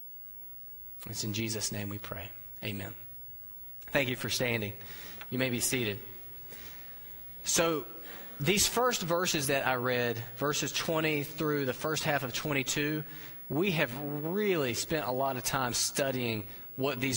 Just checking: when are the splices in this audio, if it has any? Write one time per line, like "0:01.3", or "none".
none